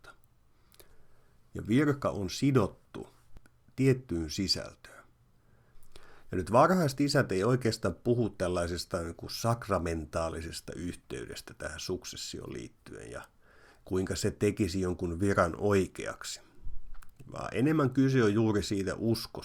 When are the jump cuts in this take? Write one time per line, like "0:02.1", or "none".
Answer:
none